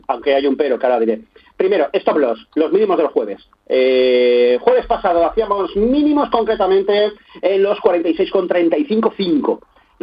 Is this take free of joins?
yes; 0 cuts

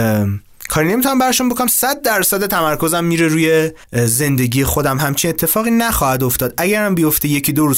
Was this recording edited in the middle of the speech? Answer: yes; 1 cut; at 3.8 s

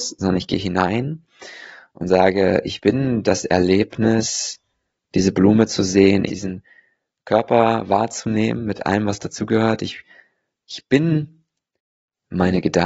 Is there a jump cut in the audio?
yes; 1 cut; at 6.3 s

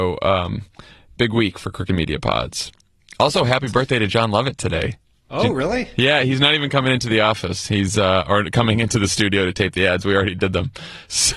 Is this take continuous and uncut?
yes; 0 cuts

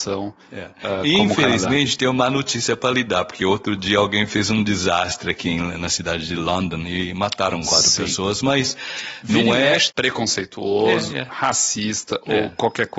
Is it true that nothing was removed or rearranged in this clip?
no; 1 cut; at 9.9 s

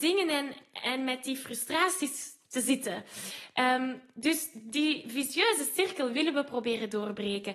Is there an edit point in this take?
no; 0 cuts

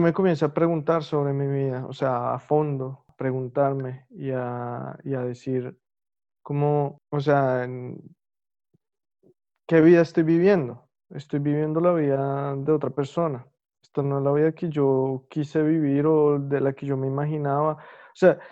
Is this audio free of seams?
yes; 0 cuts

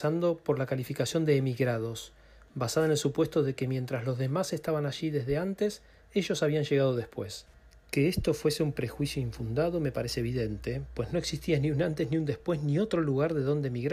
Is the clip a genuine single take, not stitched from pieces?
yes; 0 cuts

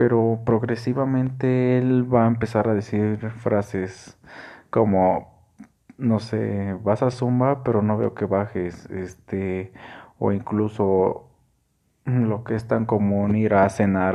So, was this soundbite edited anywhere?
no; 0 cuts

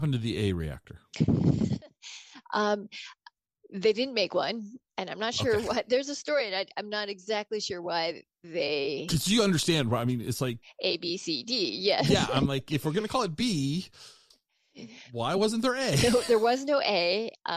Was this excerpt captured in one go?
yes; 0 cuts

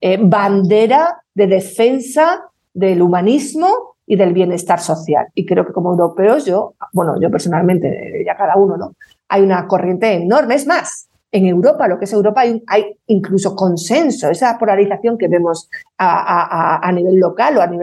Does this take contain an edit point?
no; 0 cuts

